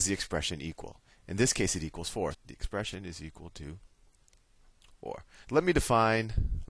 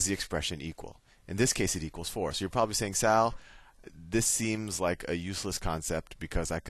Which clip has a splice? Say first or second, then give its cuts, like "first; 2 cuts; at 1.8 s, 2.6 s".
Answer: first; 2 cuts; at 2.3 s, 5.4 s